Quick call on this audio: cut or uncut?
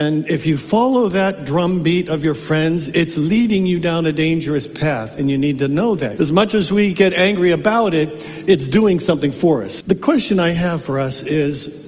cut